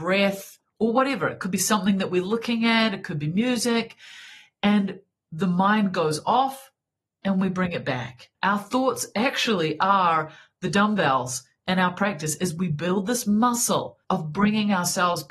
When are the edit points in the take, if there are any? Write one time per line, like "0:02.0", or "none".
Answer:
0:08.3
0:14.0